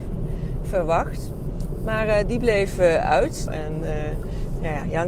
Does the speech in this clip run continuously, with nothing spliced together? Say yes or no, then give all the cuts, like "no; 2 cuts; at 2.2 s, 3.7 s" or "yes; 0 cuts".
no; 1 cut; at 3.5 s